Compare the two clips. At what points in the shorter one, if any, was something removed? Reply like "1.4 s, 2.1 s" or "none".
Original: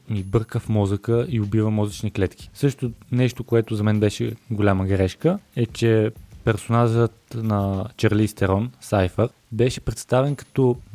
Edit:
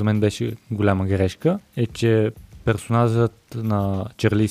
none